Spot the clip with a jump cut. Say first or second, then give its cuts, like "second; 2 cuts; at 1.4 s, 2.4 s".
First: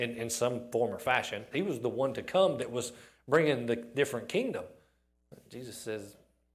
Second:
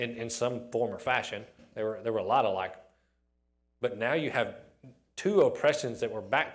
first; 1 cut; at 1.5 s